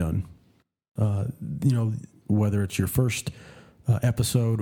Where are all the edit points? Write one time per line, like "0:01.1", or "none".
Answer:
0:01.0
0:02.2